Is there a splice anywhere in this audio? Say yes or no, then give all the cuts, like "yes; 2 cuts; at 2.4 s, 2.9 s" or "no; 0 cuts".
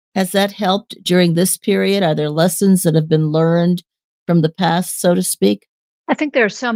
no; 0 cuts